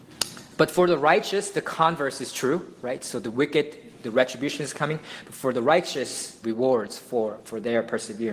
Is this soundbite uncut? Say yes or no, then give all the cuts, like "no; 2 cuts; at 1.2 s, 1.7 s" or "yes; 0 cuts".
no; 1 cut; at 6.4 s